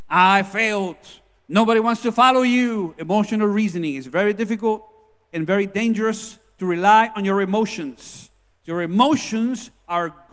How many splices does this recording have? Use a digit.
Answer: 0